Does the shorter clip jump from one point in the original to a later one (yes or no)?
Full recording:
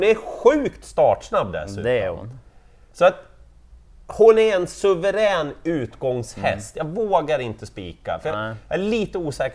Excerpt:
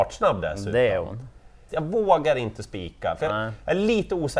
yes